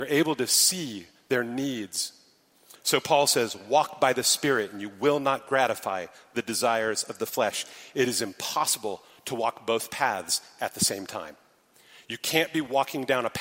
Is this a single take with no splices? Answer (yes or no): no